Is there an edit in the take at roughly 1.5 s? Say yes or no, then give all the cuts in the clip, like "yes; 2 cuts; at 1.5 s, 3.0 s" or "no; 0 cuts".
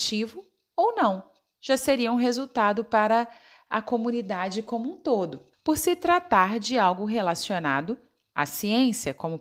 no; 1 cut; at 5.5 s